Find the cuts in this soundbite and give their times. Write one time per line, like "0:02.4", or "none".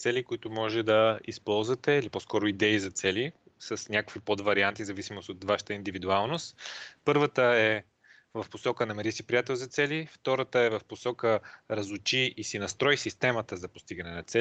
none